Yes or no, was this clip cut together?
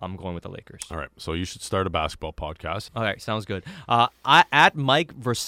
yes